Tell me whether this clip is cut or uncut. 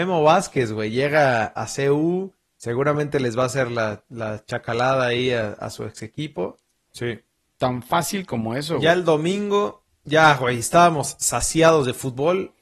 cut